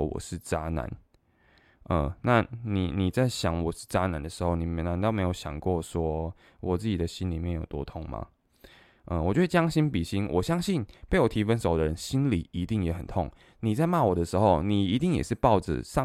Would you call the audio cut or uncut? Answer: uncut